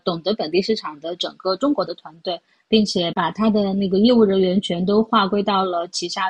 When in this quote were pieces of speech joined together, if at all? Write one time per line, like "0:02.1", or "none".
none